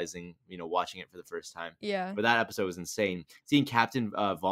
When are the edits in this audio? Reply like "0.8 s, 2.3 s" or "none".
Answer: none